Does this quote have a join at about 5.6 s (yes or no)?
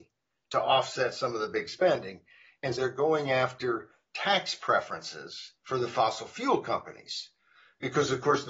yes